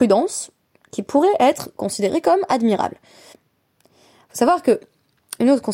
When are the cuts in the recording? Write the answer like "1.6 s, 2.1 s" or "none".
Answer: 3.3 s